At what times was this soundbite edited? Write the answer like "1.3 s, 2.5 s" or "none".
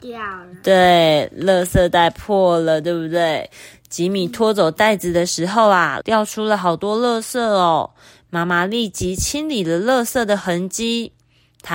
6.0 s